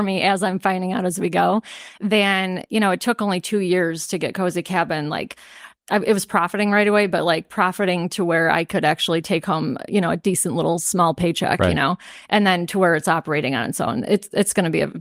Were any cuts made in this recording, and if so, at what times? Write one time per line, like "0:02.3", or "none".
none